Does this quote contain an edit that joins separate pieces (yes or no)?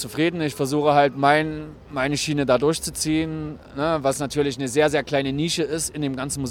no